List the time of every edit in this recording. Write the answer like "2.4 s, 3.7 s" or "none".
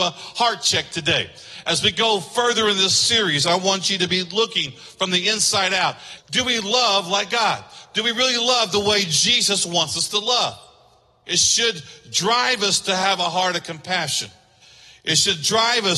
6.2 s